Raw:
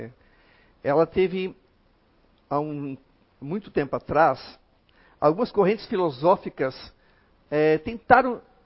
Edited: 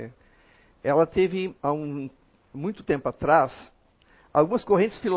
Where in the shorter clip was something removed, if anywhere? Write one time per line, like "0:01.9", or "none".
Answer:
0:01.6